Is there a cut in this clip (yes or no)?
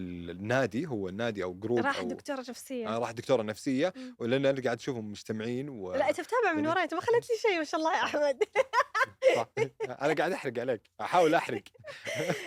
no